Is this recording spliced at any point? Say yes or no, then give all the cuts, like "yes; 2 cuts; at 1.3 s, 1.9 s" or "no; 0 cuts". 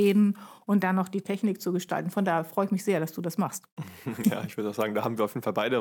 no; 0 cuts